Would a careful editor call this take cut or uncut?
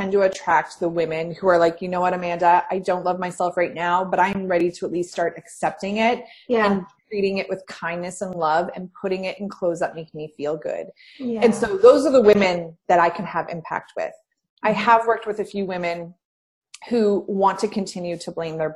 uncut